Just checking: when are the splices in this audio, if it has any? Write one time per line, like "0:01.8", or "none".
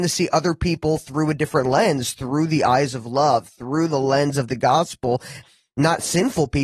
0:05.4